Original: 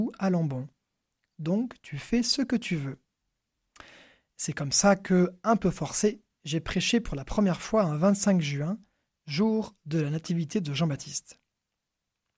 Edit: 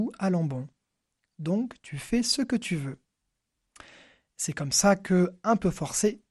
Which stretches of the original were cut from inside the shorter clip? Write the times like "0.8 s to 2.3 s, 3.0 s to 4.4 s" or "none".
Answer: none

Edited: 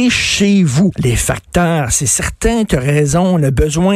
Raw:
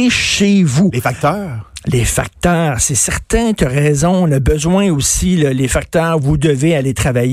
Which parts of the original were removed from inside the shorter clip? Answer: 0.9 s to 1.8 s

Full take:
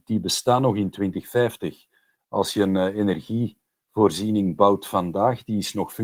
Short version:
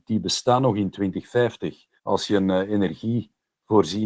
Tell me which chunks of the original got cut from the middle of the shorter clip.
2.0 s to 2.2 s

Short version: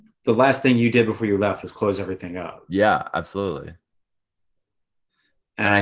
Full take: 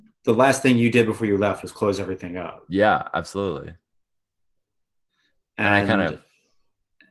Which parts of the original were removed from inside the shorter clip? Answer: none

